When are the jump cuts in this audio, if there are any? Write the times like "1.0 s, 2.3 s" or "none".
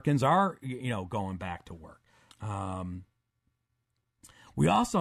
2.3 s